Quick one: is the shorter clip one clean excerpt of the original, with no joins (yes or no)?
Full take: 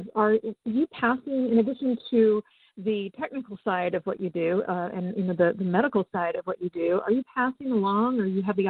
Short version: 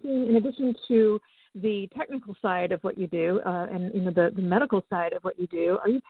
yes